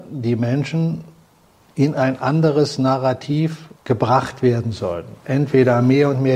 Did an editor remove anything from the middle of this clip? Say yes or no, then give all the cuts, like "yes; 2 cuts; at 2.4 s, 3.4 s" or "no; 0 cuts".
yes; 1 cut; at 3.8 s